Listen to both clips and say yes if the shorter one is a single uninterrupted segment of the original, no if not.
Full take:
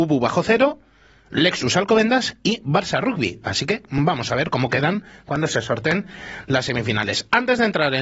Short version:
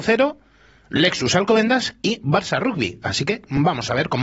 yes